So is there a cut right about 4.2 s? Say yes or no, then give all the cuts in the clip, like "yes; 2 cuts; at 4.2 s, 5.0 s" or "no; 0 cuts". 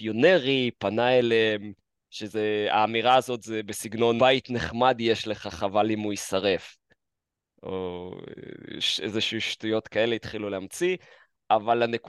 yes; 1 cut; at 4.2 s